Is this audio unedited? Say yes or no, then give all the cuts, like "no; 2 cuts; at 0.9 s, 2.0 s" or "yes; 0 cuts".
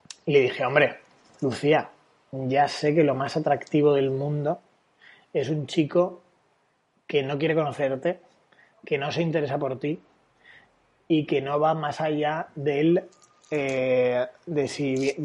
yes; 0 cuts